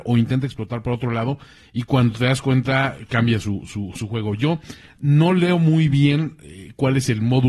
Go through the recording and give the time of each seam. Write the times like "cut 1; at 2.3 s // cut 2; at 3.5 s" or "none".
none